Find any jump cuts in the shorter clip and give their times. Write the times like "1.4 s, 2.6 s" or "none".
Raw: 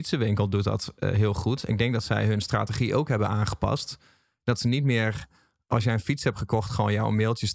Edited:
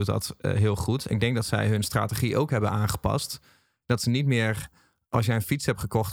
none